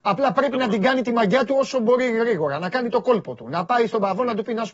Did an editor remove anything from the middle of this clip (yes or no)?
no